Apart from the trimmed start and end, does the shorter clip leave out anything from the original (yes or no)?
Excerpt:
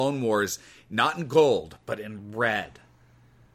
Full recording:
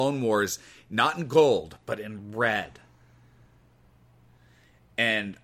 no